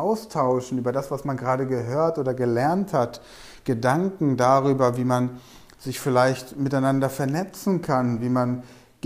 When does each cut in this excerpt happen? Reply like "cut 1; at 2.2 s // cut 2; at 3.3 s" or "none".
none